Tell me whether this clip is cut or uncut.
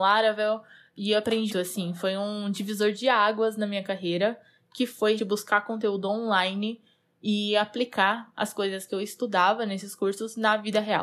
cut